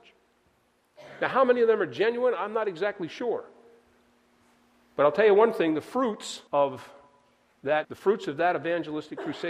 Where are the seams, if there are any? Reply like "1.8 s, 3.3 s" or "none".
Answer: 6.5 s, 7.8 s